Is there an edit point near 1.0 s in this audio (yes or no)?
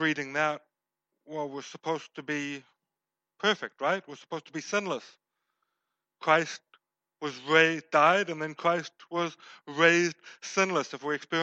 no